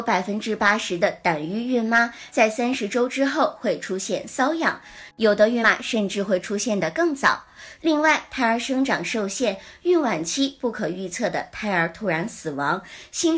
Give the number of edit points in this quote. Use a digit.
2